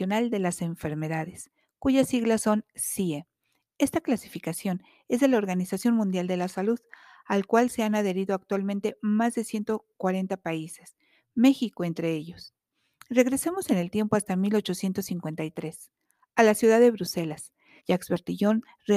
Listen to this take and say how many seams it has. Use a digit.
1